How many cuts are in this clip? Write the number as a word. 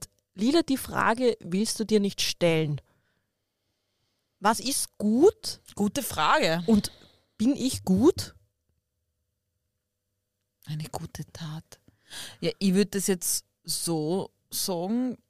zero